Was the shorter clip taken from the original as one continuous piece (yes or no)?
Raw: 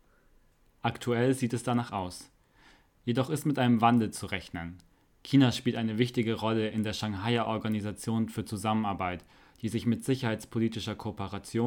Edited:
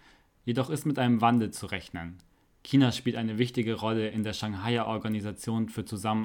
yes